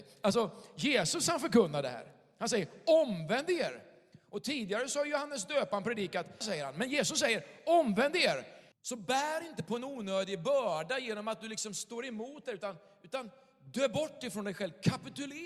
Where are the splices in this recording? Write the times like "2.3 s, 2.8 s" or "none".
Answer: 6.4 s, 8.7 s

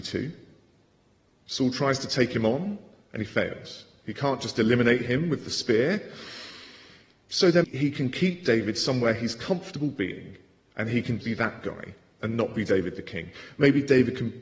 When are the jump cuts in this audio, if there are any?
7.6 s, 11.2 s

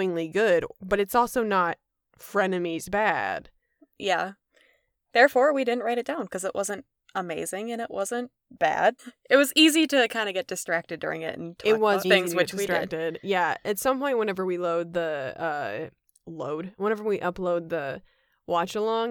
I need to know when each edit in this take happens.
9.0 s, 12.0 s

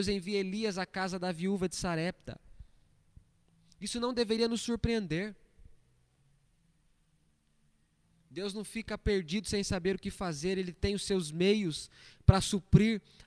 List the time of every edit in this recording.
none

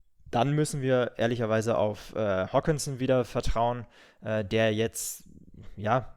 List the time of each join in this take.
none

